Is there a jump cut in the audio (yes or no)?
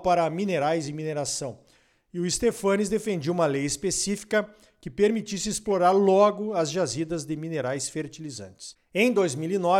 no